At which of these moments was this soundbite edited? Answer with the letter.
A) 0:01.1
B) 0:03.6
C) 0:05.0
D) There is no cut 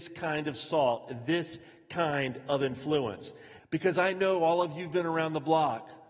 B